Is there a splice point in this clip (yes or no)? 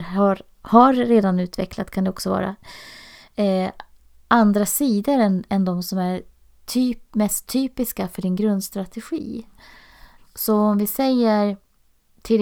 yes